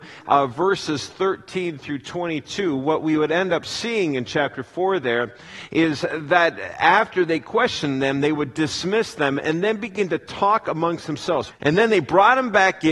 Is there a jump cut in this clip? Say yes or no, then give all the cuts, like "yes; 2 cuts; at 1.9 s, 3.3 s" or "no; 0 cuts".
yes; 1 cut; at 11.5 s